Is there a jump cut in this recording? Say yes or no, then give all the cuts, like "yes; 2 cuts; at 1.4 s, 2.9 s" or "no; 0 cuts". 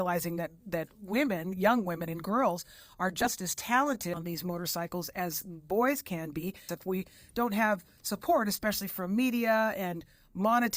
yes; 1 cut; at 6.7 s